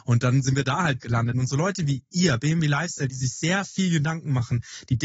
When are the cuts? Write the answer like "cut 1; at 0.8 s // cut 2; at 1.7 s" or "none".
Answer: cut 1; at 1.3 s